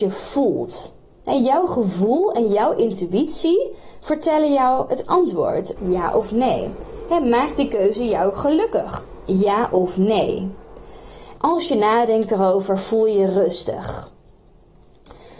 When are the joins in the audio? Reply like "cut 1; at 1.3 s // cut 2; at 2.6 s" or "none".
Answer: cut 1; at 5.8 s // cut 2; at 11.4 s